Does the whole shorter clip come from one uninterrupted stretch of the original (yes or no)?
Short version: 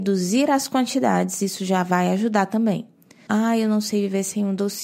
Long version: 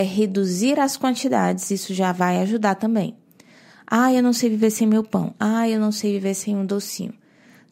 no